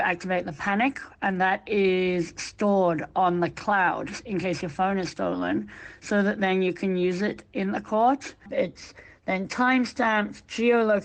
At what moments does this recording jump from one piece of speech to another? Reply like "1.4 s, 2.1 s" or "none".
8.5 s